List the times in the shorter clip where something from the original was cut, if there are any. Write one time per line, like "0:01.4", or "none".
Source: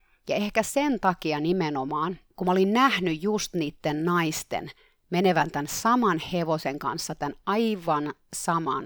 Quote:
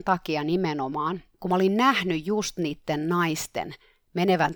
none